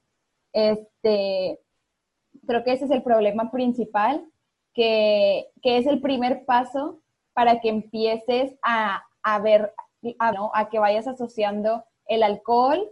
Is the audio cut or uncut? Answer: cut